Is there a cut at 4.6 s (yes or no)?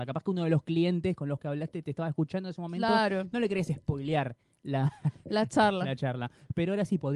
no